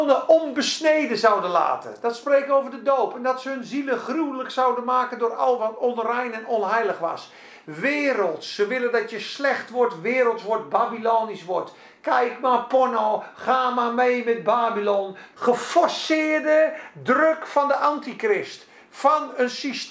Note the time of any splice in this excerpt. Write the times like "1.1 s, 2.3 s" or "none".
5.6 s, 15.3 s